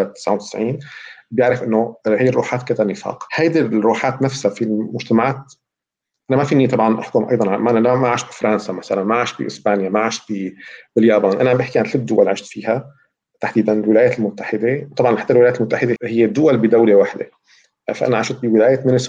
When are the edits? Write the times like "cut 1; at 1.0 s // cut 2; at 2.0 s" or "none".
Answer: cut 1; at 3.3 s // cut 2; at 16.0 s